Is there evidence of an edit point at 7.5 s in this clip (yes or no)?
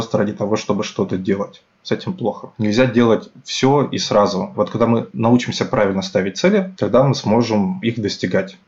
no